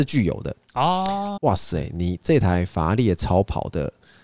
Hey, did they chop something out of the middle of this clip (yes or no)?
yes